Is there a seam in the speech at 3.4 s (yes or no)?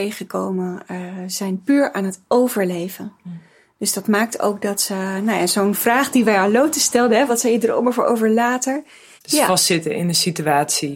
no